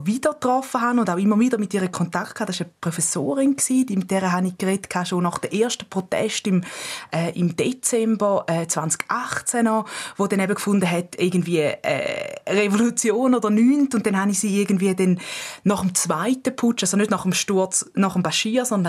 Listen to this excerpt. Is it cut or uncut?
uncut